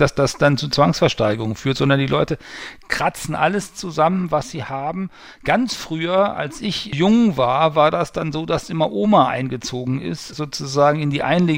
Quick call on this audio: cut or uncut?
uncut